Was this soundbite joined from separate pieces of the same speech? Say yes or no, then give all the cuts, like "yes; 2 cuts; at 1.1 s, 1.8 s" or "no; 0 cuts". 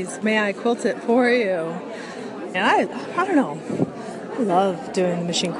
yes; 1 cut; at 2.5 s